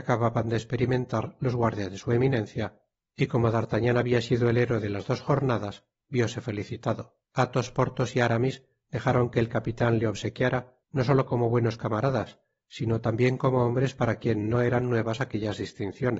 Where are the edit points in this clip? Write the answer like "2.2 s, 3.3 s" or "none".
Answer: 7.2 s, 10.8 s